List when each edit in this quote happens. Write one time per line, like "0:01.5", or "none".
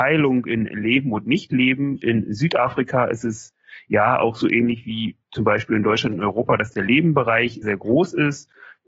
0:07.6

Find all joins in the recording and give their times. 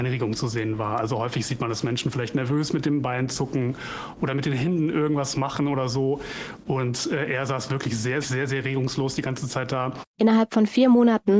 0:08.2
0:10.1

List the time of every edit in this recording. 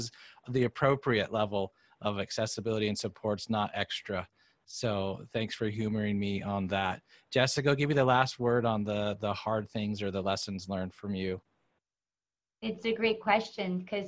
none

